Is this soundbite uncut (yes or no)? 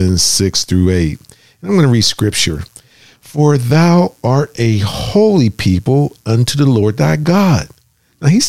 yes